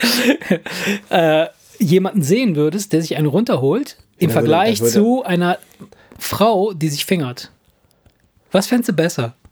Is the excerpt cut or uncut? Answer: uncut